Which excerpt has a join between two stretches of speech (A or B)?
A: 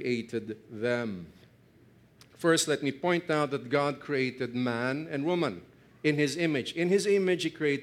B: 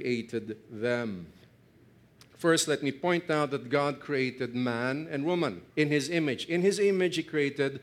B